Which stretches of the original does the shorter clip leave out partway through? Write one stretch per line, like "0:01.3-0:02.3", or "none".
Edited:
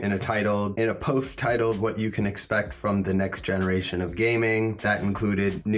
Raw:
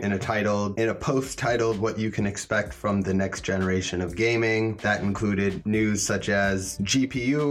none